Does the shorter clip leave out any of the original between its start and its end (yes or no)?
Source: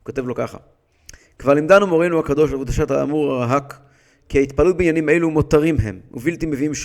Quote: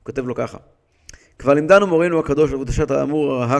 no